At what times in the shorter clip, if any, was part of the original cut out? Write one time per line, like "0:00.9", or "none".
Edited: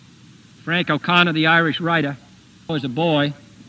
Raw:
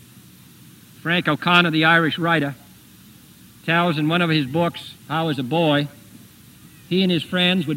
0:02.7